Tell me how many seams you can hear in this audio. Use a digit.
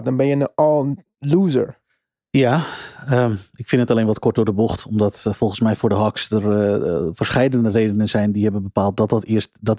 0